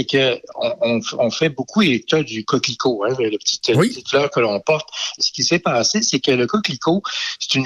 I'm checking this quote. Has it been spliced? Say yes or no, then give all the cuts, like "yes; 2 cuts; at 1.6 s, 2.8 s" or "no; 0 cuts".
yes; 1 cut; at 5.2 s